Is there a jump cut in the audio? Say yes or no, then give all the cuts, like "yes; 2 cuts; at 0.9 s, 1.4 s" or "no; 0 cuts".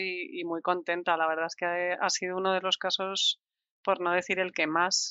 no; 0 cuts